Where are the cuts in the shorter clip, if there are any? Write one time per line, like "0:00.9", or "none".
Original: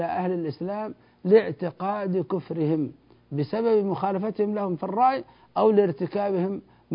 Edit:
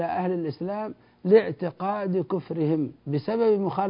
0:03.0